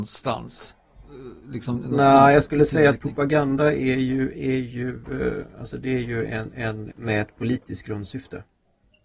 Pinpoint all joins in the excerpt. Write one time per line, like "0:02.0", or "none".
0:06.9